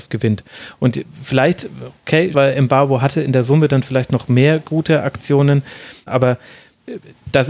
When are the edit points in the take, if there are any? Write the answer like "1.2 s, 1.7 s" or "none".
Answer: 2.3 s, 6.1 s